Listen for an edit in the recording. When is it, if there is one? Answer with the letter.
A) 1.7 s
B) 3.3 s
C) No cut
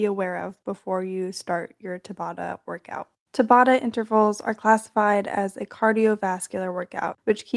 B